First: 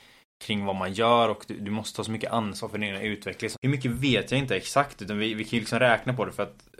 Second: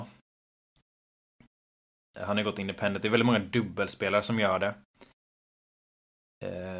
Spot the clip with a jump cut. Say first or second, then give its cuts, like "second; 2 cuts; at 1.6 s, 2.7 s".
first; 1 cut; at 3.5 s